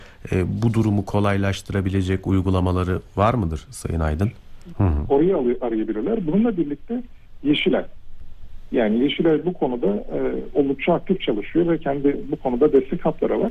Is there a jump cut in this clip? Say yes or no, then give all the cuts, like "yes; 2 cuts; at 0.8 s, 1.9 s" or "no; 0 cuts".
yes; 1 cut; at 4.7 s